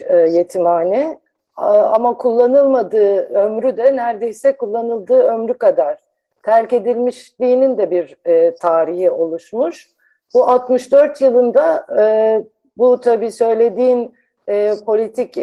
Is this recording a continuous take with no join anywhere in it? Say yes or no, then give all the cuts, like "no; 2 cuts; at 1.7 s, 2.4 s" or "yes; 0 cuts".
yes; 0 cuts